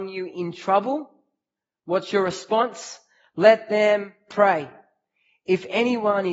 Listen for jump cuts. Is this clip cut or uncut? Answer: uncut